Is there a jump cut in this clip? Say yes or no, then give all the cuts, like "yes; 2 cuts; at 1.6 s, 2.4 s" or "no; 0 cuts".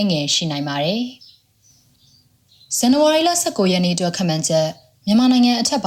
no; 0 cuts